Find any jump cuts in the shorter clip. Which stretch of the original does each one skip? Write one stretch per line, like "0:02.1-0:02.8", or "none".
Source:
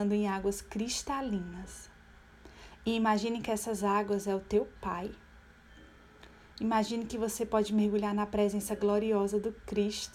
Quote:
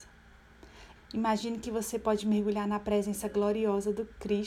0:02.8-0:06.4